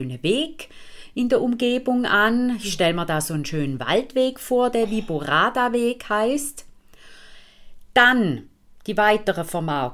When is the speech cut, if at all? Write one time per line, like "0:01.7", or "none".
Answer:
none